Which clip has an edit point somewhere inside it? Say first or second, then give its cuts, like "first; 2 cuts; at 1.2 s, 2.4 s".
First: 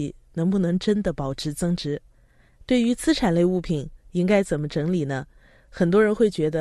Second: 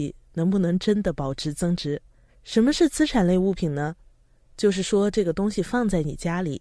second; 1 cut; at 2.3 s